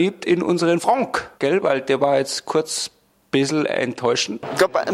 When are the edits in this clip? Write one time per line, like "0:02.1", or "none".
0:01.4